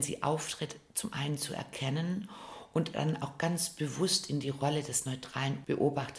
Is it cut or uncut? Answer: uncut